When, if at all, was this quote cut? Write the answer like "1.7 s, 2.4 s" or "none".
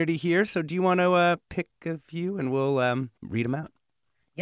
3.2 s